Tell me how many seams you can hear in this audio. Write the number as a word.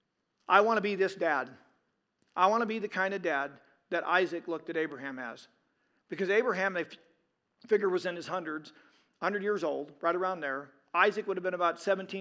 zero